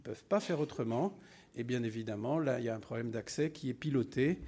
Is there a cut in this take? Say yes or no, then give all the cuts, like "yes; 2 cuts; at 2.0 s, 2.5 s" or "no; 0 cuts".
no; 0 cuts